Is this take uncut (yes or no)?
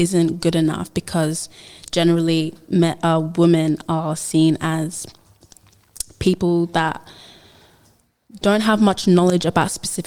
yes